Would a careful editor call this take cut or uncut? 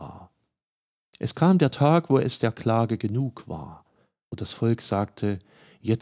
uncut